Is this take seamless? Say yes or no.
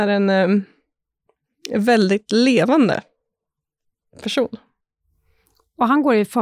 yes